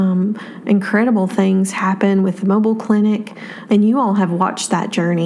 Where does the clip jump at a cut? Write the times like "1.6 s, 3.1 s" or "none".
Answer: 3.7 s